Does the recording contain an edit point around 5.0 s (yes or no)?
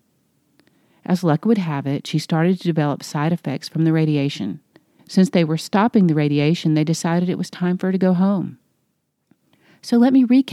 yes